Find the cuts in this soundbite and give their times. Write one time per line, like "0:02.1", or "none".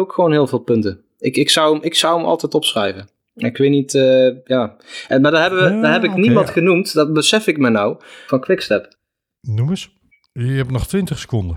none